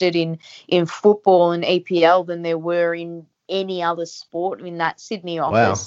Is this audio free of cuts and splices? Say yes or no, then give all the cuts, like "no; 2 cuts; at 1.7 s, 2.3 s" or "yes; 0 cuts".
yes; 0 cuts